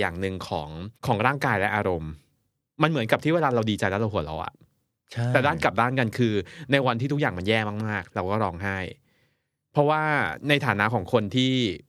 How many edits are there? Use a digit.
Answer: 1